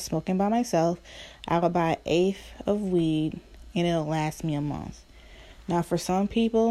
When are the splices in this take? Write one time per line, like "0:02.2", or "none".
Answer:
0:01.4